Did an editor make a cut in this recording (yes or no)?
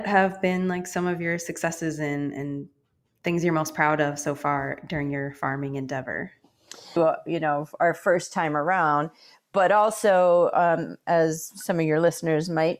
yes